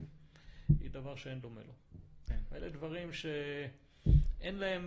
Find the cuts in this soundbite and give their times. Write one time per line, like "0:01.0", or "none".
0:02.3